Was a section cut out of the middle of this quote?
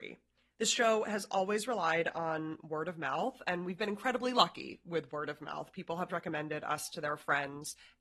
yes; 1 cut; at 6.1 s

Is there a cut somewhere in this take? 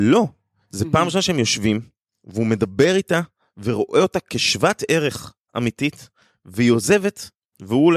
no; 0 cuts

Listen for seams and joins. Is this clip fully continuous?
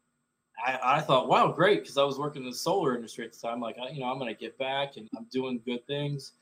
no; 1 cut; at 5.1 s

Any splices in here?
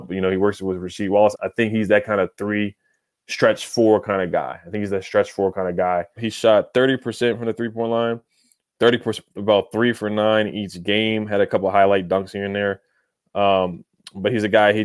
yes; 3 cuts; at 1.3 s, 6.2 s, 9.3 s

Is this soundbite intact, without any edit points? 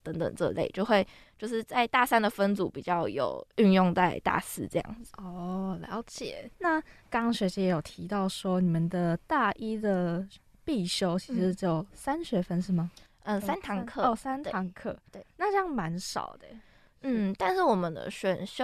no; 1 cut; at 6.5 s

